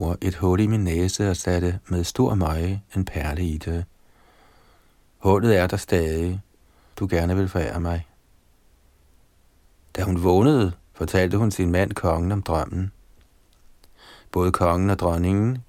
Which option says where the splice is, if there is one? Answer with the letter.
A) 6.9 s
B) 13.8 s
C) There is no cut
A